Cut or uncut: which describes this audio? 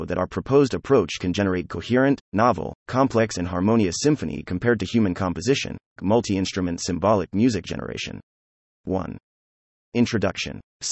cut